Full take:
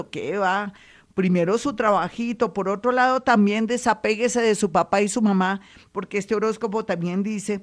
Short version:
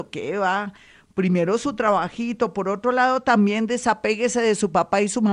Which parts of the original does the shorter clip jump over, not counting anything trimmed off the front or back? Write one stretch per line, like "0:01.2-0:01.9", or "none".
none